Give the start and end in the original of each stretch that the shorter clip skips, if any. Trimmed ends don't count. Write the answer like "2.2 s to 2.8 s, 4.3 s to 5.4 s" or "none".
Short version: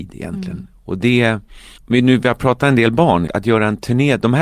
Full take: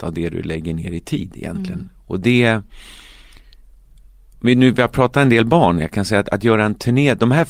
3.0 s to 4.3 s, 5.8 s to 6.2 s